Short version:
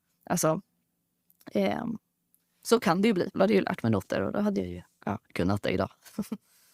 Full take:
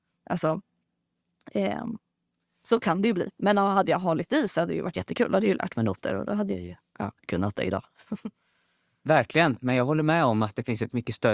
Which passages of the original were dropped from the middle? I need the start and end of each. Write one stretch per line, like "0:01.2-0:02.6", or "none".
0:03.3-0:05.3